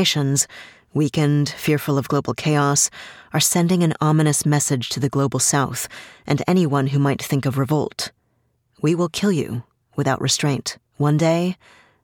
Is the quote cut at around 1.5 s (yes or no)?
no